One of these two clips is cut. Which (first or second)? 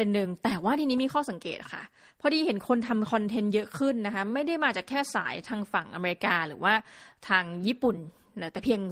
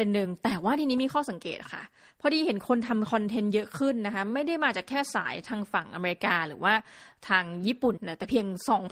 second